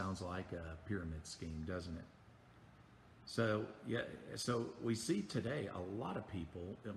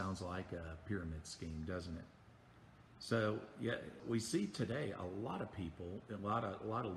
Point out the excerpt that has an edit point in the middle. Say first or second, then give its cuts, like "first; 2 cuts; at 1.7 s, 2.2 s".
second; 2 cuts; at 2.9 s, 4.0 s